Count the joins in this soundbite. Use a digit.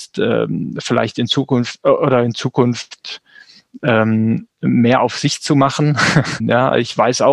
1